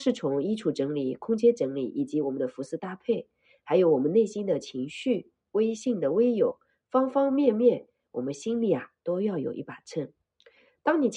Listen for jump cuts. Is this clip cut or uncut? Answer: uncut